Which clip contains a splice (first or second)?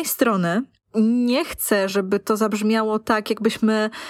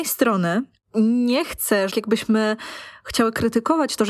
second